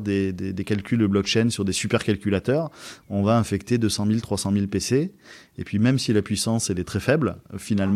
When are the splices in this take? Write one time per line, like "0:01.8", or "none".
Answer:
none